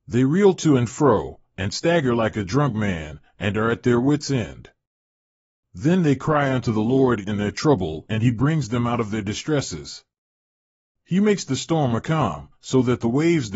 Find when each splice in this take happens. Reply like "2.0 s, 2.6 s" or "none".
none